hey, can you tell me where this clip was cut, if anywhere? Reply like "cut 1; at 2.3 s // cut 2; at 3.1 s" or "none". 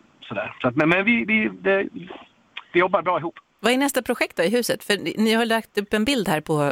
none